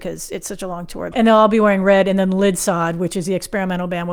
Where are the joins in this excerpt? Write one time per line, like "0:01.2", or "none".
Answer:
0:01.1